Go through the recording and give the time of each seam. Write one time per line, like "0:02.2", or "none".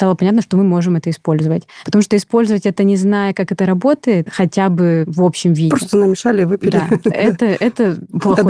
none